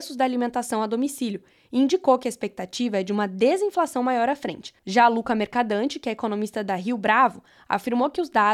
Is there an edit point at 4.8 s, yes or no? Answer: yes